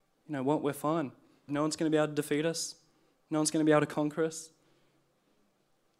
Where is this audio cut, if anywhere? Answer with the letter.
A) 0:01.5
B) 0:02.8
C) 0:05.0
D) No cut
A